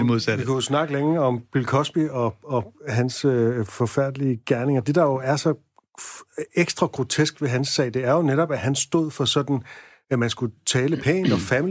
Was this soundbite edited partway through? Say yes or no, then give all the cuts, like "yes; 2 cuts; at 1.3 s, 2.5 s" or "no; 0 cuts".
no; 0 cuts